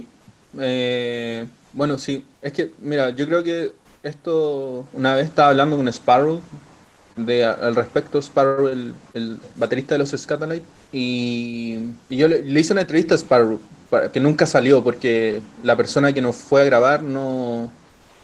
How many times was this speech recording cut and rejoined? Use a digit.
3